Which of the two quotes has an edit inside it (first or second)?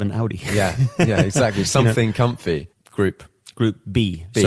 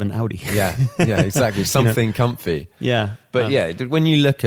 first